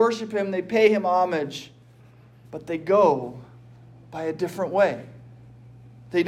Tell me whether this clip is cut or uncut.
cut